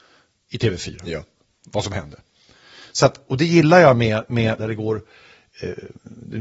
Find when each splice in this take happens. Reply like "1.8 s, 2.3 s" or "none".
3.3 s, 4.6 s

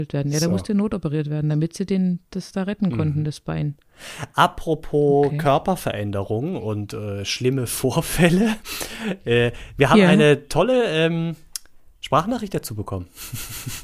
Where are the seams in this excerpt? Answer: none

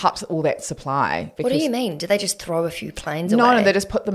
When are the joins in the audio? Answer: 1.3 s

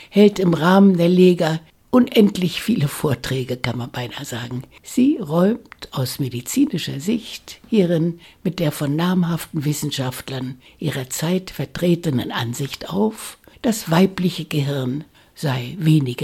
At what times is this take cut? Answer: 4.8 s

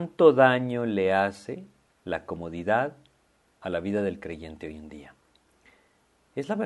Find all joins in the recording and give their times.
none

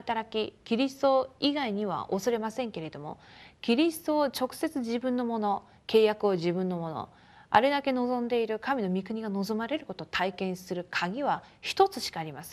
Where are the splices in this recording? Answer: none

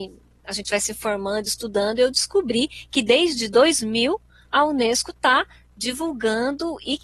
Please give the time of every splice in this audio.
none

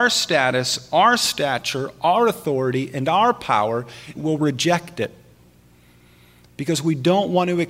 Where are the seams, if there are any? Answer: 4.2 s

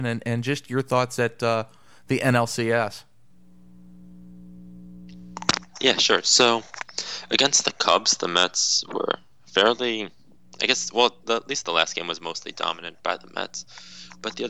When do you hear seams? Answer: none

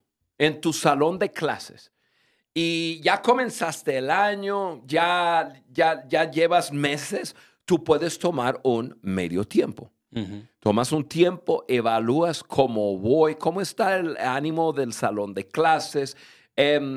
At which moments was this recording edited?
none

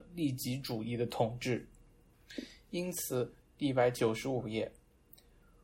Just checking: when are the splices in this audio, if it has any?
3.4 s

